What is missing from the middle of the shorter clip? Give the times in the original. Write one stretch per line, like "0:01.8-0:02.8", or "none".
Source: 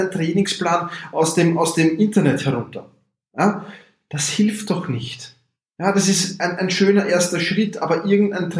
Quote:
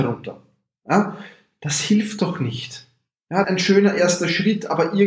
0:05.9-0:06.6